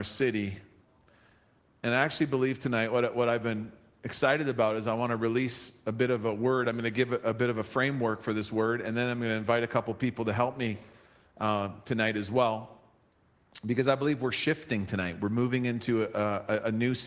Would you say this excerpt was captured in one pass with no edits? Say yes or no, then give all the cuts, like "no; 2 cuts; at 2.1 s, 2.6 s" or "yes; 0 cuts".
yes; 0 cuts